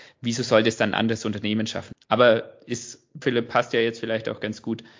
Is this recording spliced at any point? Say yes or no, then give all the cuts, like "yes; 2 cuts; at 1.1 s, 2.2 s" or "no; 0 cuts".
yes; 2 cuts; at 1.9 s, 3.2 s